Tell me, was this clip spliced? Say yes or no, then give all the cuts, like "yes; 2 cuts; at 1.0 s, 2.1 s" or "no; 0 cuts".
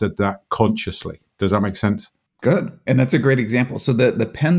yes; 1 cut; at 2.9 s